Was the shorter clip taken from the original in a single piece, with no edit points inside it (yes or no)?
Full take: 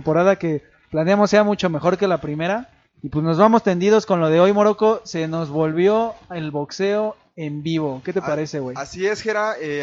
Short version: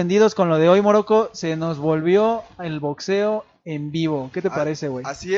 yes